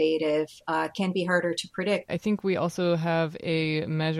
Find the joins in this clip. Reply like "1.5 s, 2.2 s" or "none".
2.1 s